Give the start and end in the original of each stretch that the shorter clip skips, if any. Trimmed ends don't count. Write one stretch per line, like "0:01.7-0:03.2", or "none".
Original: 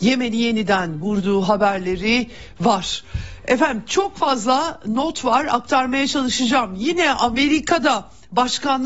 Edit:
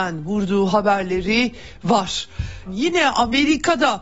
0:03.4-0:06.7